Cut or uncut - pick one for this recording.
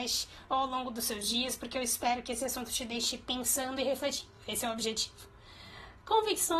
uncut